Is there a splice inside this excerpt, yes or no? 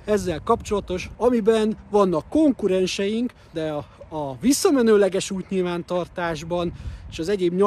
yes